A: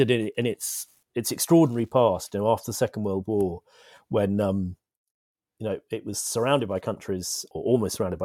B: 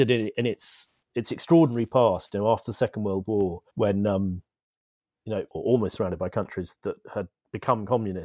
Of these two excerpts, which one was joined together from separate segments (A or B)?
B